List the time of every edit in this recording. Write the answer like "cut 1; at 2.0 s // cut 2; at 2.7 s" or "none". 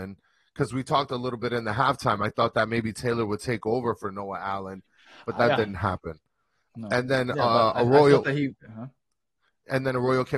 none